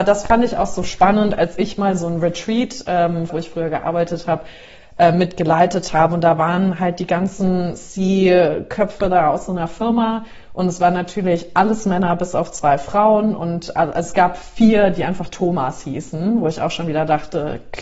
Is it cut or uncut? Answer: cut